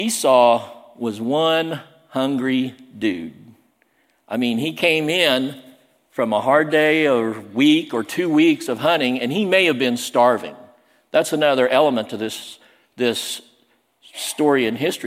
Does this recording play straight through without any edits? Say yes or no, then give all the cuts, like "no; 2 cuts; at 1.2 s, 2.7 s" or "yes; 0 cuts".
yes; 0 cuts